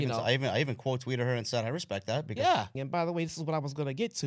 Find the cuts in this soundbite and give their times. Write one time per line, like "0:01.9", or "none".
0:02.8